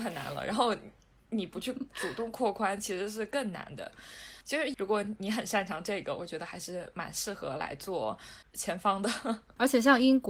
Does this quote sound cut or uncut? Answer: cut